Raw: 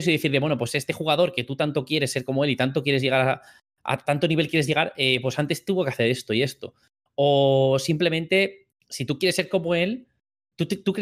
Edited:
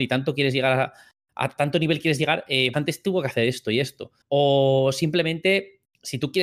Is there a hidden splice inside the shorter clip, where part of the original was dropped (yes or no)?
yes